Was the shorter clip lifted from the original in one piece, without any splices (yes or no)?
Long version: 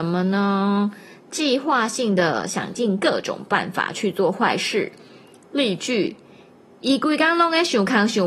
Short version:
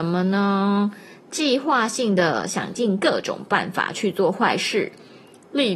yes